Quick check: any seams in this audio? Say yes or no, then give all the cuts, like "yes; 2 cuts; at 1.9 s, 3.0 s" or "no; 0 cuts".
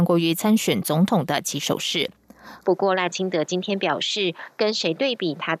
yes; 1 cut; at 2.6 s